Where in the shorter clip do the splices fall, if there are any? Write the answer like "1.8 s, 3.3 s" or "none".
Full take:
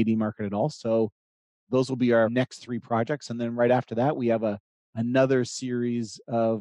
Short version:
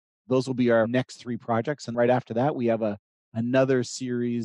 1.9 s